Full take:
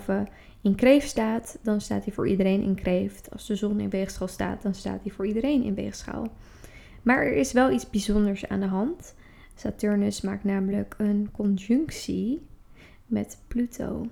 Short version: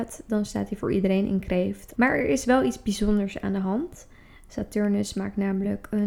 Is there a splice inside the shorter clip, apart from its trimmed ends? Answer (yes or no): yes